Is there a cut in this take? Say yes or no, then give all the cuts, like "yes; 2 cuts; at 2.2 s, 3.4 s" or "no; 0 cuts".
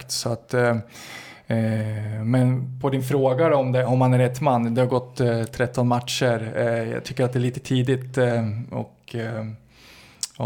no; 0 cuts